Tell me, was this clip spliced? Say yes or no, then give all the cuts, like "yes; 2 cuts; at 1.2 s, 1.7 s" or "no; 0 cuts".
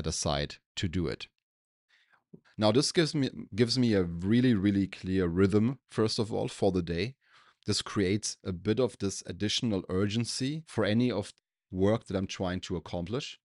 yes; 1 cut; at 2.4 s